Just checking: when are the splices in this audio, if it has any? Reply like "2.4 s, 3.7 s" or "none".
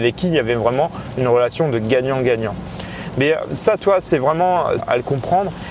4.8 s